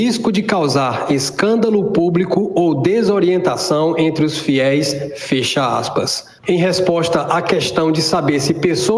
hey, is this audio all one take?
no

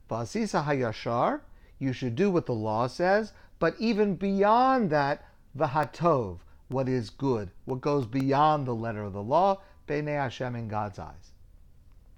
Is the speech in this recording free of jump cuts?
yes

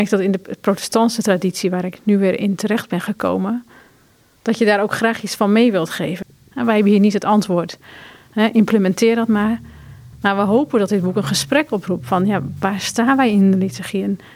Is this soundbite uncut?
no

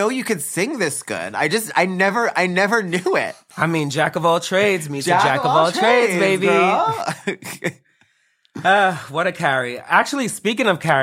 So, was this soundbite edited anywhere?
no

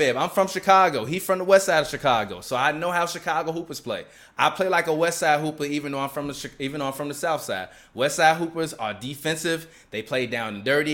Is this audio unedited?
yes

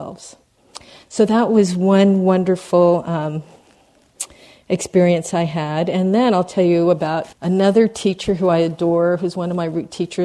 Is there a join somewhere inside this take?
yes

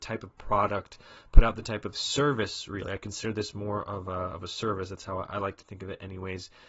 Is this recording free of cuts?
yes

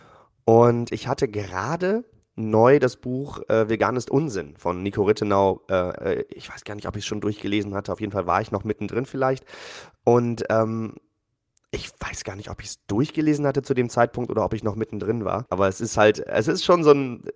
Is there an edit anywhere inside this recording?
yes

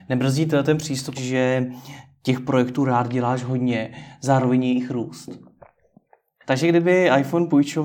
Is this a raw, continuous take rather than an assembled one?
no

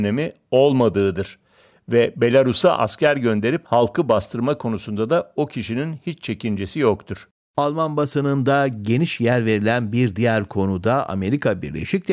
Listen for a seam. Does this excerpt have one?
no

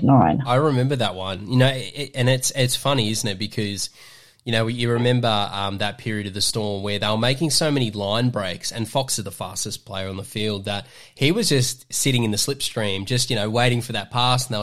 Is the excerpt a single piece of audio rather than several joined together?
yes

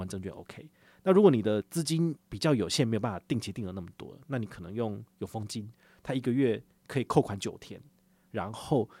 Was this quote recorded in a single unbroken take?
yes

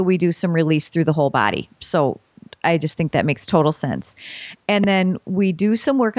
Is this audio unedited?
yes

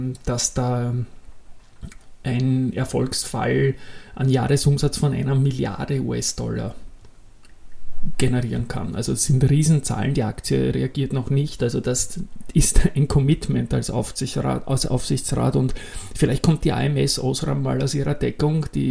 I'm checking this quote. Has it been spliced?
yes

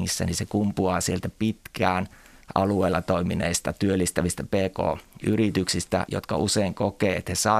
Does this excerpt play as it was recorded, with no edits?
yes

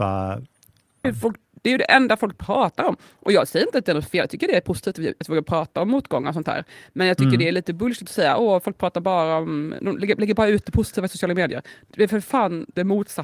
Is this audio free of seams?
no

